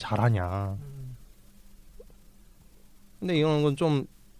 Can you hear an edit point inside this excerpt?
no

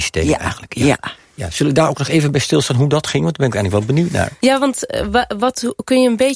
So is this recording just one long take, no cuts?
no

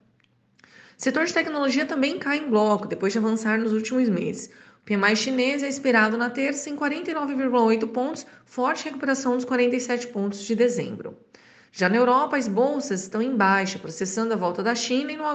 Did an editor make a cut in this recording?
no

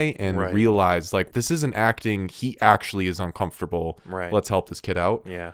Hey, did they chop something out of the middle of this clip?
yes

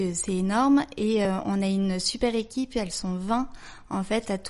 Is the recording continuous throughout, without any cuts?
yes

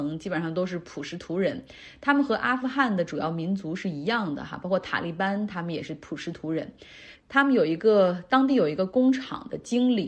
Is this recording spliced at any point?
yes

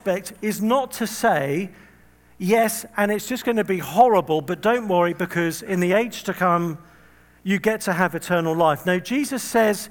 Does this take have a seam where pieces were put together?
no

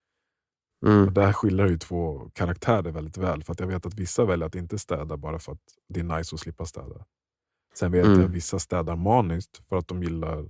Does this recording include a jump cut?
no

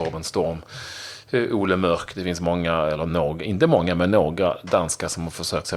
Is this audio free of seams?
yes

